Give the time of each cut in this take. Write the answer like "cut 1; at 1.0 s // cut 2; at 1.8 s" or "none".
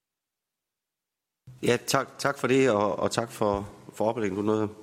cut 1; at 1.6 s